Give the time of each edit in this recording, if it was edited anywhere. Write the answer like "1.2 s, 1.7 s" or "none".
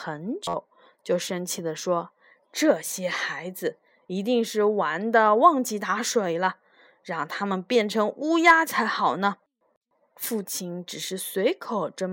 0.9 s